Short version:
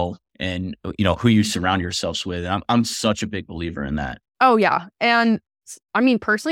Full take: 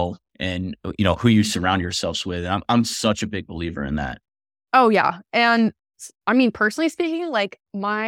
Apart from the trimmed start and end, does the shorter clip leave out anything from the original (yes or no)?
yes